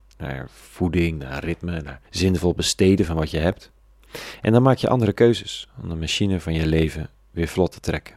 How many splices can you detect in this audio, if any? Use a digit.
1